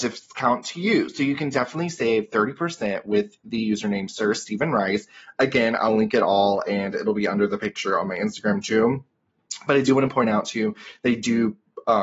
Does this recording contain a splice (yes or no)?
no